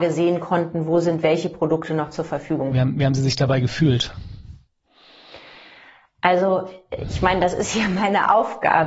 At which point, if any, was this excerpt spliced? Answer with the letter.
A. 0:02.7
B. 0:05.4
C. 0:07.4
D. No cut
A